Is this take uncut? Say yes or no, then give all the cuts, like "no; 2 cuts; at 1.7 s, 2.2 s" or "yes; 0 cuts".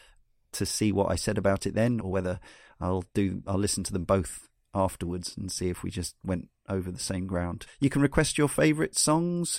no; 2 cuts; at 2.0 s, 7.7 s